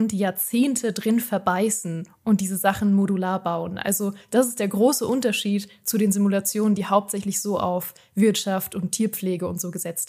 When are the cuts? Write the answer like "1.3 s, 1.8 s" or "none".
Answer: none